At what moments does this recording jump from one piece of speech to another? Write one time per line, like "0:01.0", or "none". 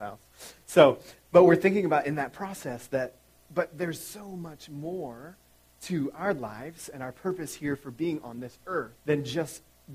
0:09.0